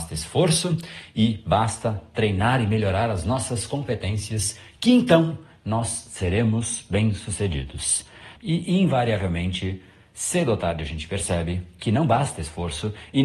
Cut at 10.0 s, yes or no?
no